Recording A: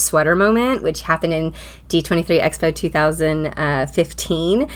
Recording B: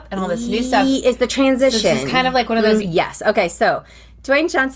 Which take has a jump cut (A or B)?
B